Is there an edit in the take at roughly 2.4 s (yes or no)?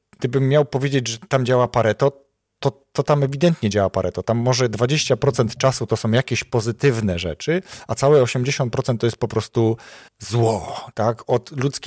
no